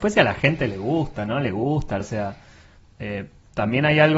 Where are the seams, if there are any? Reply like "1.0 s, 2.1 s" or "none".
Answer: 2.0 s